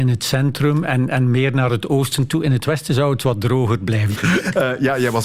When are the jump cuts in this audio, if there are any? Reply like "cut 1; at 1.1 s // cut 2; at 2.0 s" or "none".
cut 1; at 4.1 s

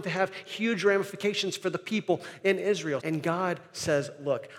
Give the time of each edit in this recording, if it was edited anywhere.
cut 1; at 3.0 s

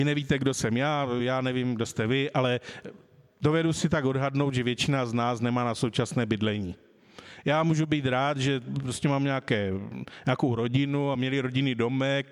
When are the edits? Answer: none

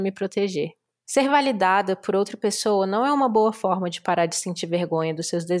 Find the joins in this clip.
none

